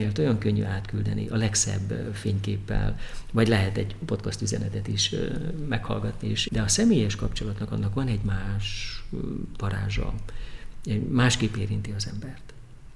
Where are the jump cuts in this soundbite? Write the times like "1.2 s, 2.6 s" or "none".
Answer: 6.5 s